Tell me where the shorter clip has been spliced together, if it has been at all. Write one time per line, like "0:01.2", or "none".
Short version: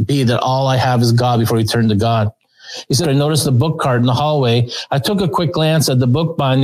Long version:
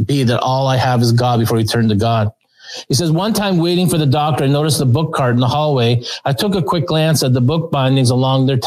0:03.0